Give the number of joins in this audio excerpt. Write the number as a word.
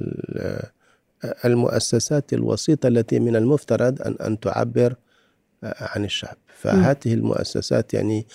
zero